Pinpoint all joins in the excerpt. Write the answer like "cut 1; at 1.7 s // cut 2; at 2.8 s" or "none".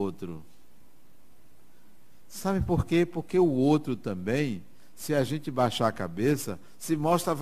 none